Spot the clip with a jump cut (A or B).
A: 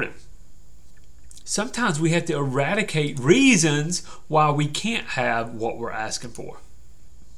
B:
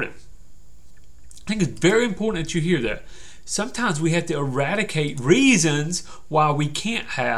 A